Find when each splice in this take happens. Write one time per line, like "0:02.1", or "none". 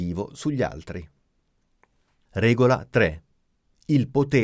none